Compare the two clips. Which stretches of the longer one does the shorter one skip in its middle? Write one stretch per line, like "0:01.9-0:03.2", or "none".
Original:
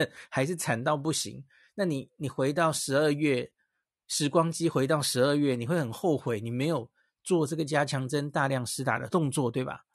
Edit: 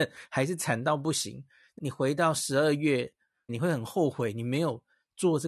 0:01.8-0:02.2
0:03.9-0:05.6